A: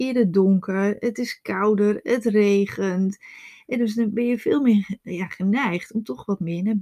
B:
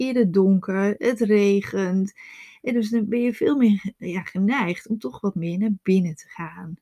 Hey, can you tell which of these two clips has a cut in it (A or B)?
B